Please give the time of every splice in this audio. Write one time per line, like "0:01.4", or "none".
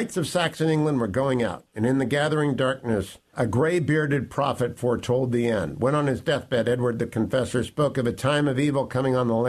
0:03.3